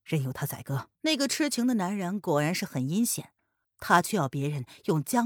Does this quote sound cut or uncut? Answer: cut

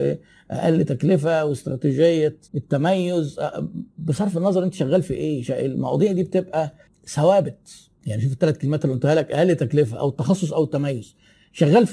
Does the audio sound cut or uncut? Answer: cut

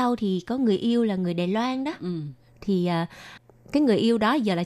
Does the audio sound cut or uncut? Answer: uncut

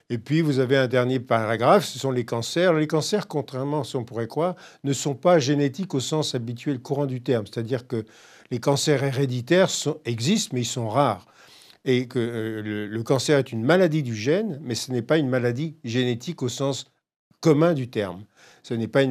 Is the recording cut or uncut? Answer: uncut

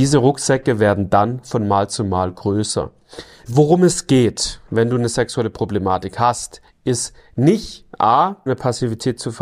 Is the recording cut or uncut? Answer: cut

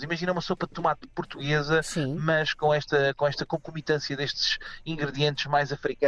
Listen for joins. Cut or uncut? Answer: uncut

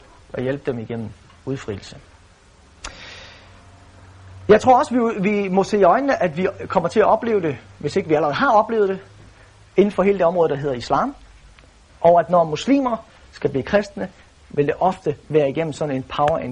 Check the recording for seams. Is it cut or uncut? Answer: cut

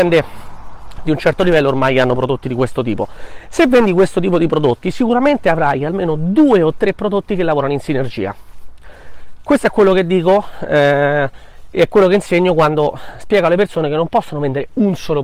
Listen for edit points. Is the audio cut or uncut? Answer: uncut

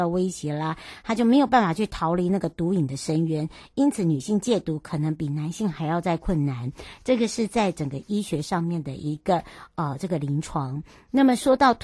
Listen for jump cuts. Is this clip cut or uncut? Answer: uncut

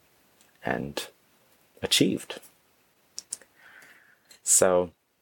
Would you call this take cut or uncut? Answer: uncut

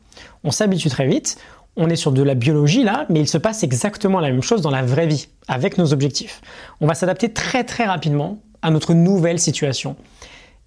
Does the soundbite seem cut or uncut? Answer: uncut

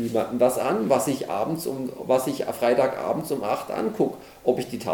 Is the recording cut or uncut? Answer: uncut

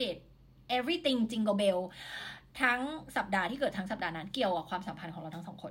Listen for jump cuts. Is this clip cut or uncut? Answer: uncut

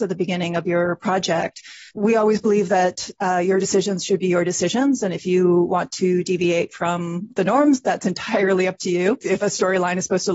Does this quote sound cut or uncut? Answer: cut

